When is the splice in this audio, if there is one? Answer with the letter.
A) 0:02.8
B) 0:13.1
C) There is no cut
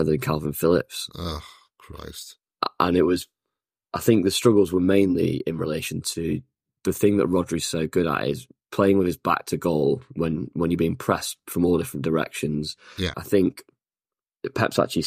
B